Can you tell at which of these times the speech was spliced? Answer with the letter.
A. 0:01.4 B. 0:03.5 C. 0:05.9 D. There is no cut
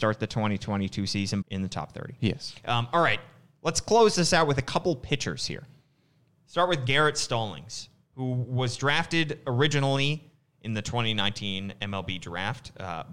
A